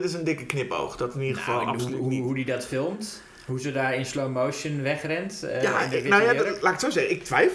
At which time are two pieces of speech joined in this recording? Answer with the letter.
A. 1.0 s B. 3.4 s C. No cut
C